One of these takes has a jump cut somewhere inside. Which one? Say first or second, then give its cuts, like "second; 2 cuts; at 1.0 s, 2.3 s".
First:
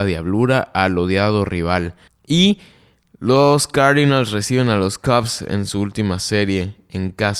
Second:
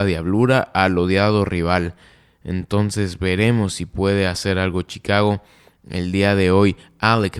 first; 1 cut; at 2.1 s